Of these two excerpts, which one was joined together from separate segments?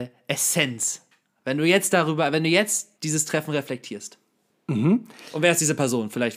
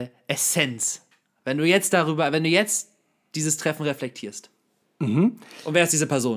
first; 1 cut; at 2.9 s

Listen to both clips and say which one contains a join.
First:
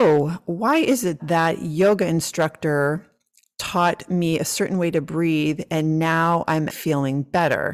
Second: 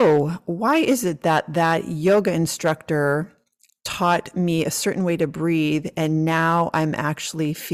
first; 2 cuts; at 1.2 s, 6.7 s

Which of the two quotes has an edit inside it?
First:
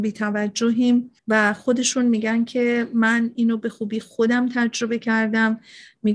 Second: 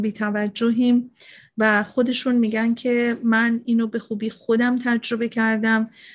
first; 1 cut; at 1.2 s

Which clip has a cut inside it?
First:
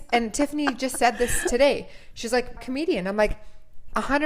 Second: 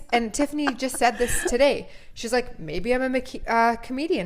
first; 1 cut; at 2.6 s

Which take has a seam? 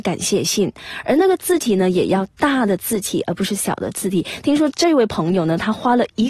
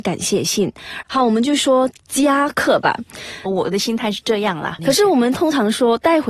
second; 3 cuts; at 1.0 s, 3.5 s, 4.8 s

